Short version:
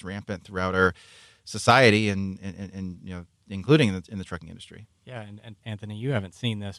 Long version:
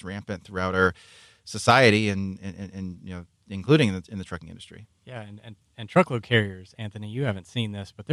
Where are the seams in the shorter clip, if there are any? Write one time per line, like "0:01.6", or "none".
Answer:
0:05.6